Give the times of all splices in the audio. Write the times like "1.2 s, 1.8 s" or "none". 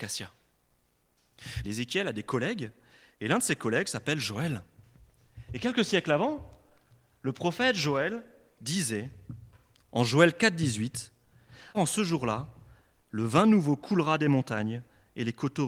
1.6 s, 11.7 s